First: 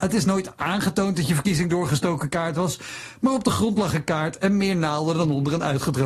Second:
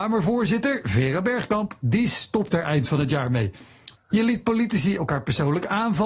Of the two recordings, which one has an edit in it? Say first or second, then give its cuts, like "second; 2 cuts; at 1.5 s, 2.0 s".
second; 1 cut; at 4.0 s